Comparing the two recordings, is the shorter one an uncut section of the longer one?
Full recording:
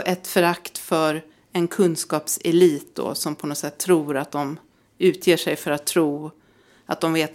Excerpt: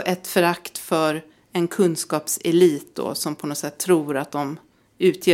yes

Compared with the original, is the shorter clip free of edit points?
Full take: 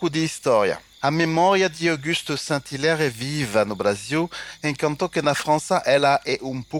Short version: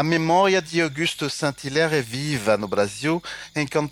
yes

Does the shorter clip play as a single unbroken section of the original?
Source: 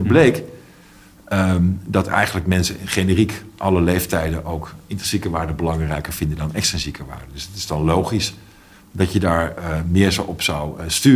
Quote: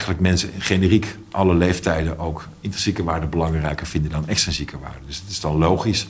yes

